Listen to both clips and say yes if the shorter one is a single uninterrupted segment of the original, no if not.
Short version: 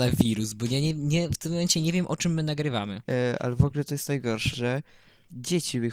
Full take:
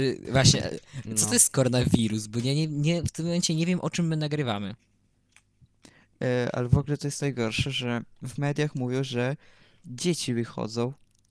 no